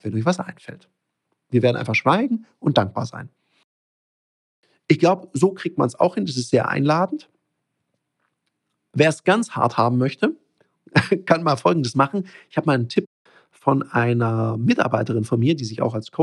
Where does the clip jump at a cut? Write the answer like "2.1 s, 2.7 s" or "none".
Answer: none